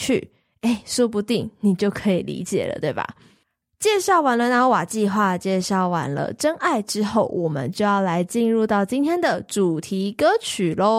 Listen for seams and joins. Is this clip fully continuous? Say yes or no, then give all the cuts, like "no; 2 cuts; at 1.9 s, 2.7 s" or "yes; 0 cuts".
yes; 0 cuts